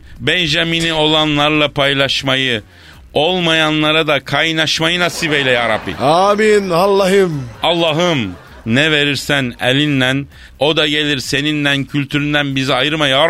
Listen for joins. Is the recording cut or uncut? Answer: uncut